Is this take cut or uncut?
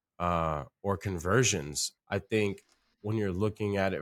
cut